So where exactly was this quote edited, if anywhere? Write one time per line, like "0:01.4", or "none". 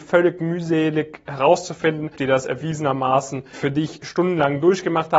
0:02.2
0:03.5

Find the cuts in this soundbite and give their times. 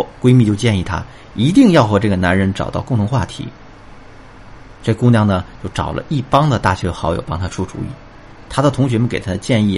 none

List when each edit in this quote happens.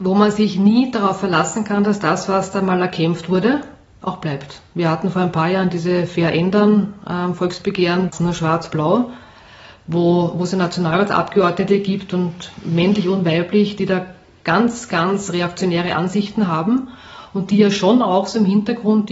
0:08.1

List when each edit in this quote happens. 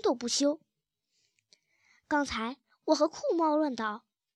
none

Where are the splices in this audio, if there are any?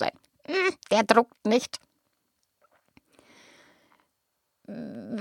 none

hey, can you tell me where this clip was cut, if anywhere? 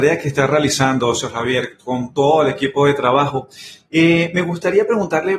none

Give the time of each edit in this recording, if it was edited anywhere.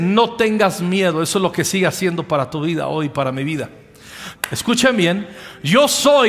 0:04.3

